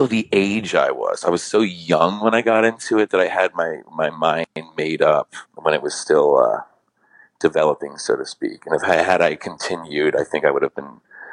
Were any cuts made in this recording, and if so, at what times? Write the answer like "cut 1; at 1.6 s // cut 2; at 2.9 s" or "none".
cut 1; at 5.5 s